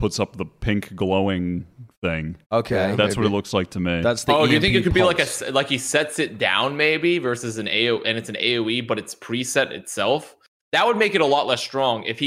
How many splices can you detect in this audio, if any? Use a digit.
1